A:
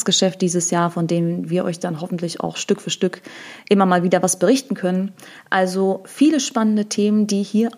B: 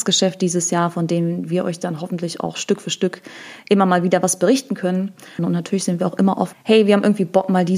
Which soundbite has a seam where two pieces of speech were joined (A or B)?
B